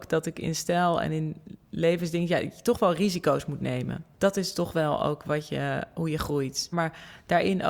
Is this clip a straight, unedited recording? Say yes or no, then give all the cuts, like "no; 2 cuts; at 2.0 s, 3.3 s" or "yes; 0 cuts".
no; 2 cuts; at 4.1 s, 6.7 s